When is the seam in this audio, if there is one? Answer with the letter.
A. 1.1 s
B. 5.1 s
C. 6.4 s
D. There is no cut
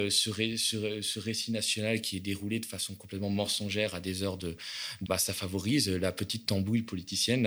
B